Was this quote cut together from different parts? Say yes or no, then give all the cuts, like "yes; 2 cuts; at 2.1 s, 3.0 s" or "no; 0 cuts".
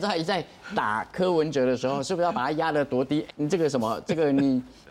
yes; 1 cut; at 3.3 s